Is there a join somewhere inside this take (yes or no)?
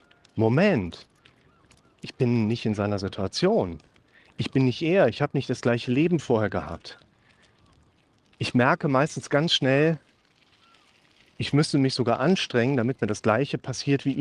no